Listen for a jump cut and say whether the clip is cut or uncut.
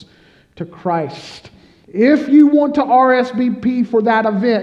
cut